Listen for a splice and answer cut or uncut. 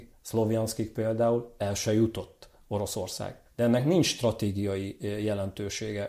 cut